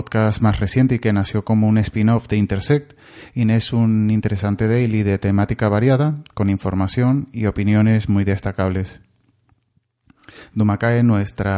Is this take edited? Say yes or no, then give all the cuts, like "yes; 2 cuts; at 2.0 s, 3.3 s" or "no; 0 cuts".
no; 0 cuts